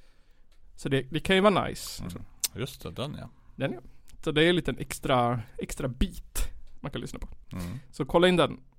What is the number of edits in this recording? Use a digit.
1